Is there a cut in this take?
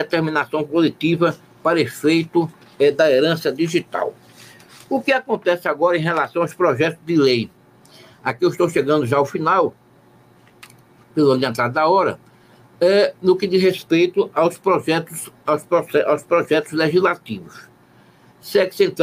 no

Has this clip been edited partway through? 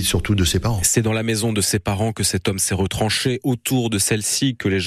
no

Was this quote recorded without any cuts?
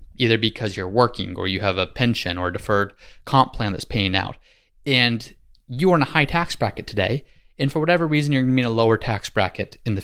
yes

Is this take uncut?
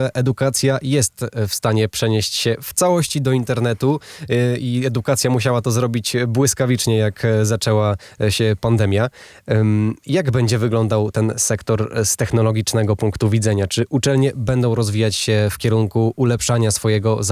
yes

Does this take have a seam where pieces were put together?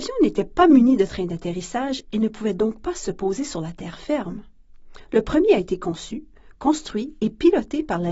no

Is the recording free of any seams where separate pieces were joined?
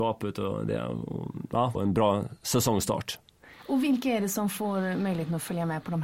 no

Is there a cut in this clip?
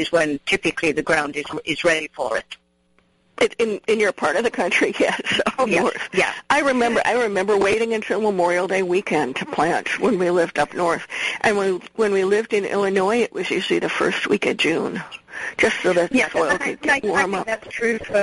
no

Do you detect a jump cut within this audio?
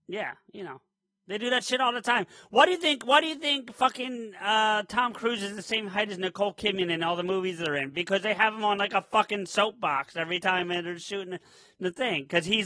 no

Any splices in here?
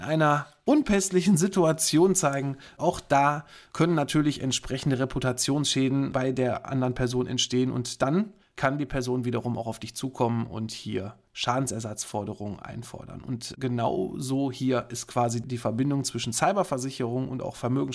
no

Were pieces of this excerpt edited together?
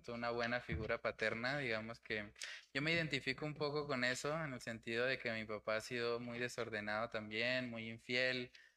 no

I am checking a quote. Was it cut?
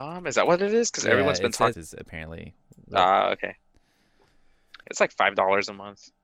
yes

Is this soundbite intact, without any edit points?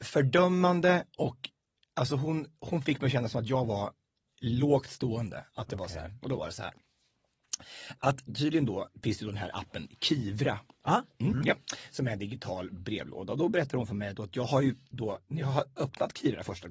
yes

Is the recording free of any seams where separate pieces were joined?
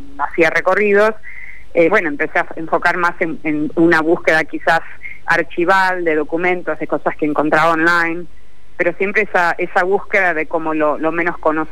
no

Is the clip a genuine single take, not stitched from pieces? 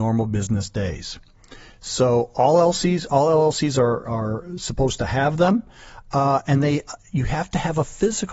yes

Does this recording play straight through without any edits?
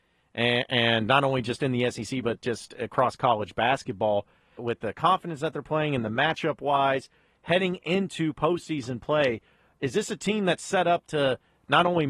no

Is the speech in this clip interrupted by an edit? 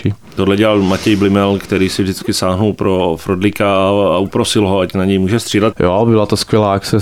yes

